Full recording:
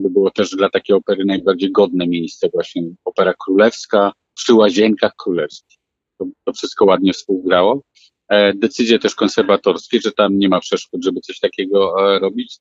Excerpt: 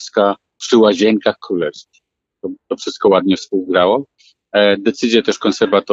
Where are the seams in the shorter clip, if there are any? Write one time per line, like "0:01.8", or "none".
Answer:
none